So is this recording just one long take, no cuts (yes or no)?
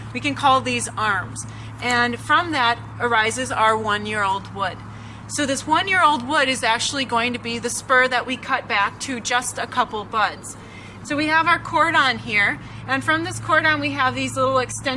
no